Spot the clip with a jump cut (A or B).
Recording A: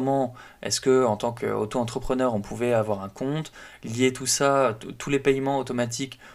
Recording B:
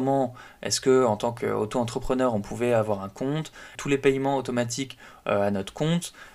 B